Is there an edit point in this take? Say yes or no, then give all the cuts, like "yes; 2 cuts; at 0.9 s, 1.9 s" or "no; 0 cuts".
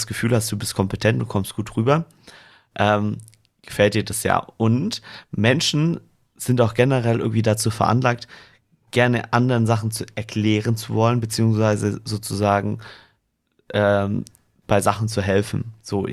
no; 0 cuts